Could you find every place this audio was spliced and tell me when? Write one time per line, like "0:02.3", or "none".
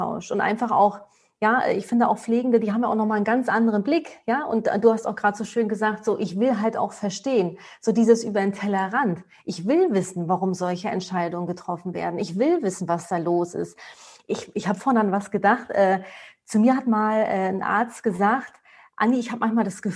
none